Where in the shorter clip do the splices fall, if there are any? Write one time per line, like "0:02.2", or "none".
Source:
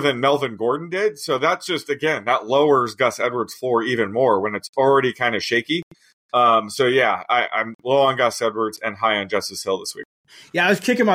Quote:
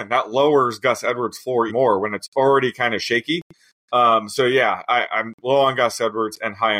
0:01.7